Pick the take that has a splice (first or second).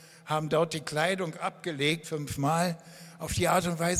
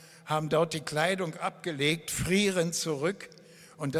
first